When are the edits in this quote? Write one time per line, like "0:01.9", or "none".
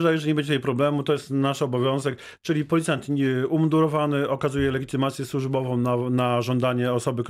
none

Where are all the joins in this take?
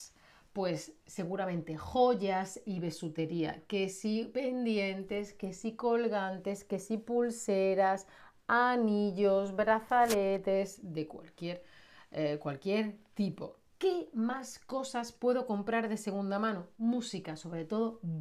none

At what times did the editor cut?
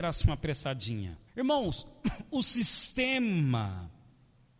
0:01.3

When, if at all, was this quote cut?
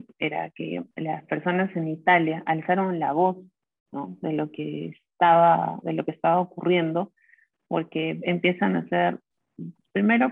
0:00.9

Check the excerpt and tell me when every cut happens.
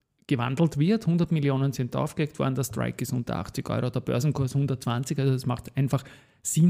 none

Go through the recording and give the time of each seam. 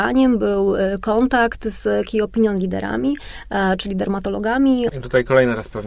0:04.9

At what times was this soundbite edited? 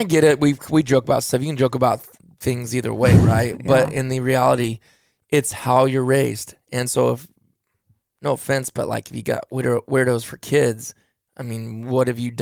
none

